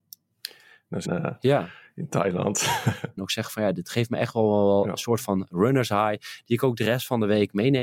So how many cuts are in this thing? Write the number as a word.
two